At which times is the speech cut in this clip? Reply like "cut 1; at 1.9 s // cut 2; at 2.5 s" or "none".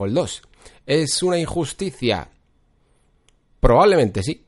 none